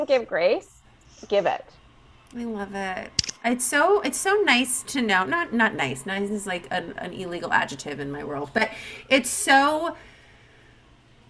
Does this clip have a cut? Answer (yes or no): no